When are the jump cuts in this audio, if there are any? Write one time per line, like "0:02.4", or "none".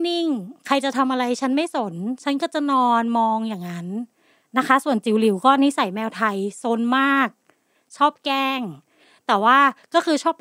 none

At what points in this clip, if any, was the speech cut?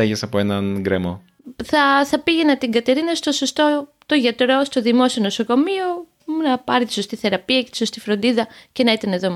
none

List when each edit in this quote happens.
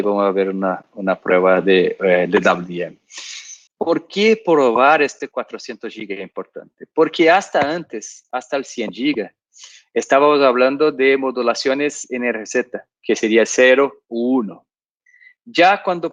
0:03.7

